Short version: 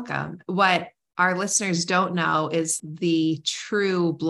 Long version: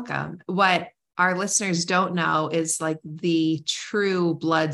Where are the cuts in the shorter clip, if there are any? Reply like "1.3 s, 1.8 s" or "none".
2.8 s